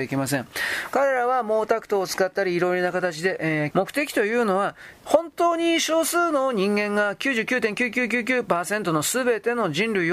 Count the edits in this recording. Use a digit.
1